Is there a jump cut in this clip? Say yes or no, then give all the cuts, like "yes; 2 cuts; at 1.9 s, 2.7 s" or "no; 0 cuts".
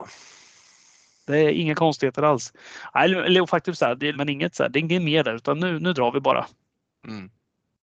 yes; 1 cut; at 4.1 s